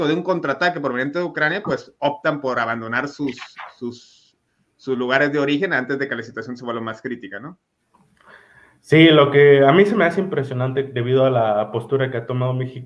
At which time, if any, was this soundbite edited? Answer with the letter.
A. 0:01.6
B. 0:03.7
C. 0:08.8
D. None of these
D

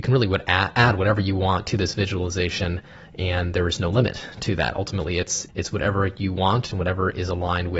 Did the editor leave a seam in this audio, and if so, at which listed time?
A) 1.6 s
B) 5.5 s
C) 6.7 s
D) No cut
B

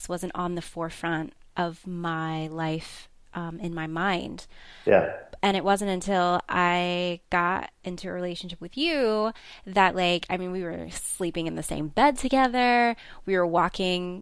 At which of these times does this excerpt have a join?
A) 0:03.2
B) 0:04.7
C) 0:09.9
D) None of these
D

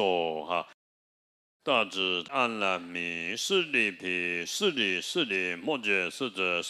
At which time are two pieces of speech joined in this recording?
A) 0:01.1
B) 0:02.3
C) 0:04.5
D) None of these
B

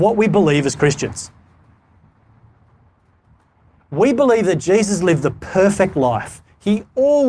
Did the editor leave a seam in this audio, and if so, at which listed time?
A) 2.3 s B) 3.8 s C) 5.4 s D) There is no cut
D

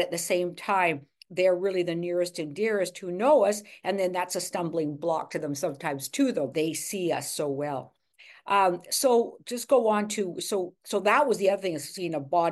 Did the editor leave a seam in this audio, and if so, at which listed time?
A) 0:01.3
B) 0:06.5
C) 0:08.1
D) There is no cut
B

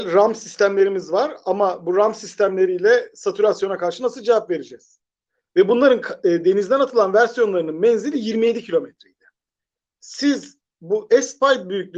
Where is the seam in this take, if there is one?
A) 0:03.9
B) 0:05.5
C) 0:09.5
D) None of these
B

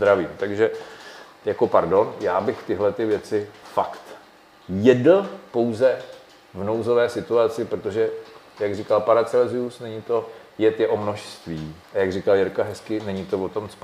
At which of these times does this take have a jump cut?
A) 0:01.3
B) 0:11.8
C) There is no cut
B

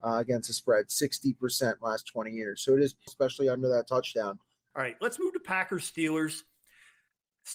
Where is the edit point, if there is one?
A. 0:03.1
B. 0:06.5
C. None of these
A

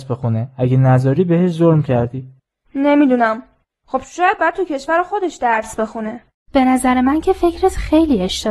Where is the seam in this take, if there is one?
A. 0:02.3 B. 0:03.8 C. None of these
C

